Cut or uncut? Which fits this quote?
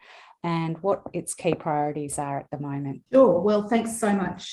cut